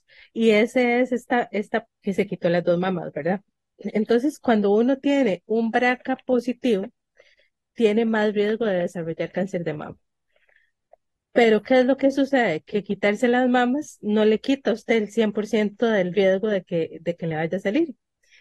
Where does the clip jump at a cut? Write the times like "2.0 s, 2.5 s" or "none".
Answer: 1.9 s